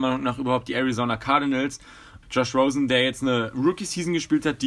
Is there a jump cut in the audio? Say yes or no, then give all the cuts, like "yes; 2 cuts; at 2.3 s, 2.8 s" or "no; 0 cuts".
yes; 1 cut; at 2.2 s